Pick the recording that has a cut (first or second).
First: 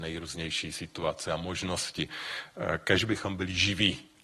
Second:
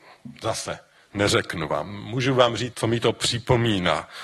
second